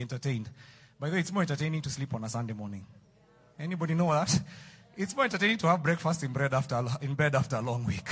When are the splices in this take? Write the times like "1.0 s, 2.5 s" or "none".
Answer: none